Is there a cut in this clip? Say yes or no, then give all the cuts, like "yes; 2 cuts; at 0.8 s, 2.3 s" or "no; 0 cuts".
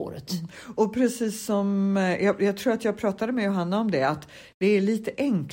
no; 0 cuts